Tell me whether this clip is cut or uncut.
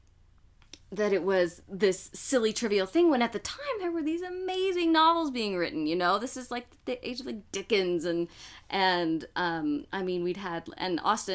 uncut